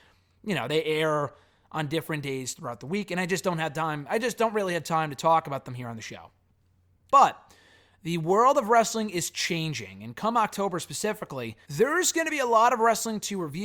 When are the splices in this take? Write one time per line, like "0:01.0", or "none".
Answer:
0:07.1
0:11.6

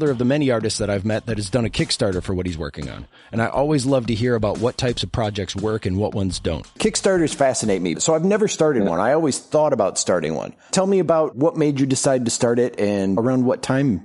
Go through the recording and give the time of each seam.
none

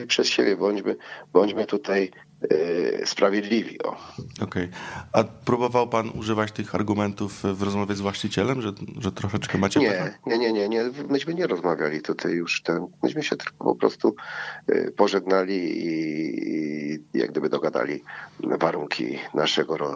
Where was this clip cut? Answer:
none

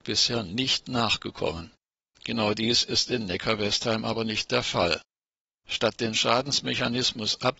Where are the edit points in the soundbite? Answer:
0:02.1

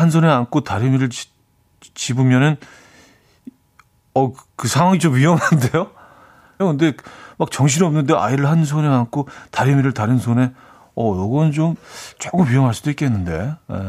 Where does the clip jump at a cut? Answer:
0:06.6

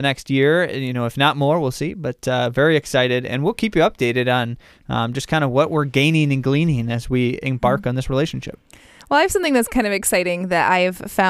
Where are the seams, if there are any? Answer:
none

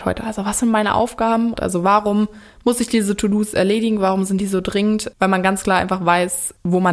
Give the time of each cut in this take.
0:01.5

